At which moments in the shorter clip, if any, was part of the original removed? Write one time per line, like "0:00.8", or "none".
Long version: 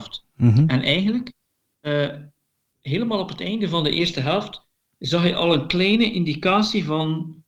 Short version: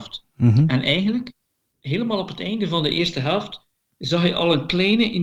0:01.7